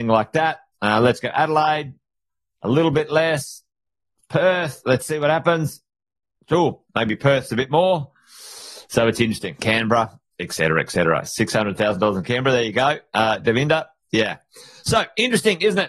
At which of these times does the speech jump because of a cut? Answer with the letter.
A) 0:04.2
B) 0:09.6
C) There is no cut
B